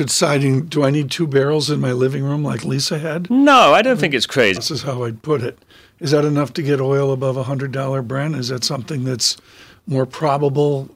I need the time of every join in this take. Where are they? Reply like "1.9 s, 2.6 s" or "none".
4.6 s